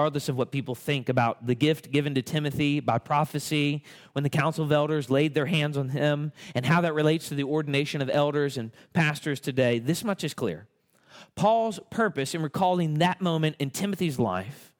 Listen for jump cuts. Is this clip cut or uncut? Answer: uncut